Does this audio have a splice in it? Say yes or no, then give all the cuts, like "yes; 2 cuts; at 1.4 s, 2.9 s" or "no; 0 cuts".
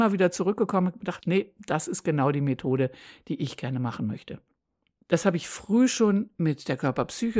yes; 2 cuts; at 1.2 s, 5.0 s